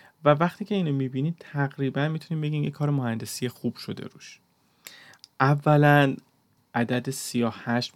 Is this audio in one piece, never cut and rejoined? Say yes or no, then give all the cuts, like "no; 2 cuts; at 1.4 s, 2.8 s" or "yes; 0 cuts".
no; 1 cut; at 6.6 s